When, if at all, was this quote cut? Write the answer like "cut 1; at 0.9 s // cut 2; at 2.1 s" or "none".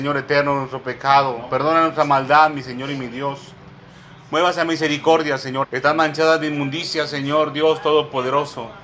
cut 1; at 5.6 s